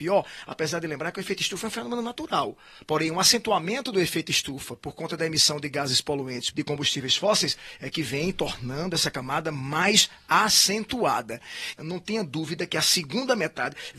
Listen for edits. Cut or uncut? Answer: cut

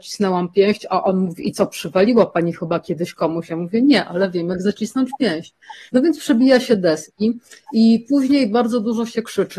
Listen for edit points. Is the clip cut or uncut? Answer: cut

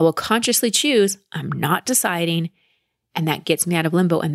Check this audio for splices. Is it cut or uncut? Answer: uncut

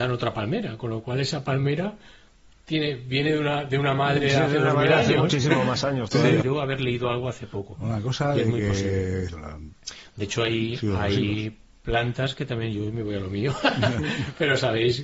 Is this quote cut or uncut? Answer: cut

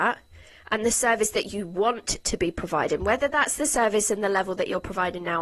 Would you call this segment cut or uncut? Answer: uncut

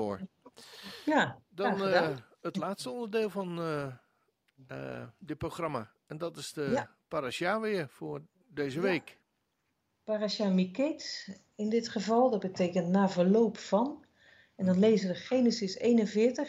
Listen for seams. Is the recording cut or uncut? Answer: uncut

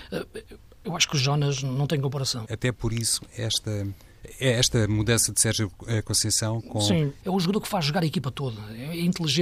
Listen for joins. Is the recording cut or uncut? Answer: cut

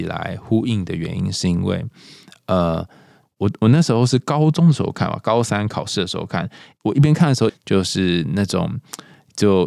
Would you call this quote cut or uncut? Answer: cut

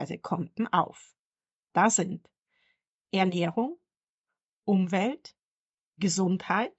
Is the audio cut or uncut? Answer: uncut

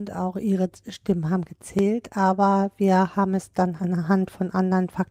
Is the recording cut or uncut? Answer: cut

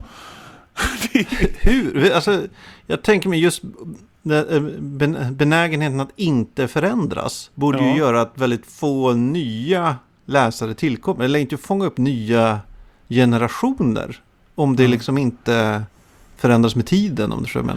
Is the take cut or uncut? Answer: cut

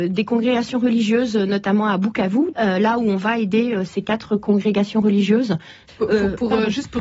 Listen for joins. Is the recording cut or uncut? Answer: cut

